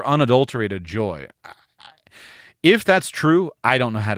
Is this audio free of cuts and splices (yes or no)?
yes